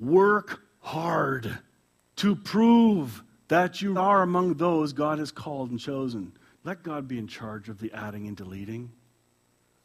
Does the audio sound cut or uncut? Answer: cut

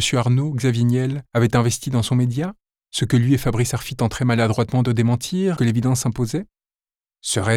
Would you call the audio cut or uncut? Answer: cut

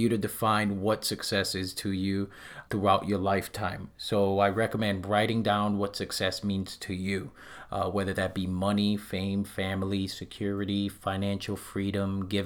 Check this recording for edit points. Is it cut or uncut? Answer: cut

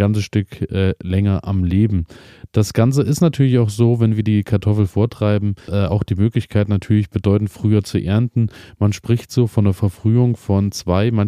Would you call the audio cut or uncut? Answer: cut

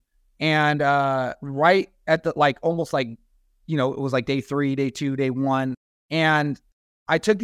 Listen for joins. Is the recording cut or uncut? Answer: uncut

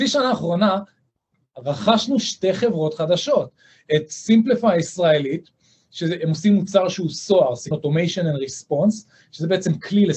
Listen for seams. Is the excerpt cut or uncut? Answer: cut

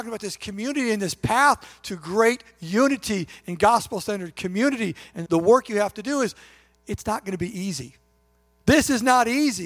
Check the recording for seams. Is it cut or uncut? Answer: cut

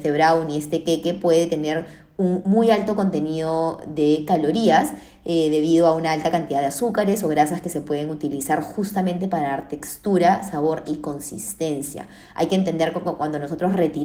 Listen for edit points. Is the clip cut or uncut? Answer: uncut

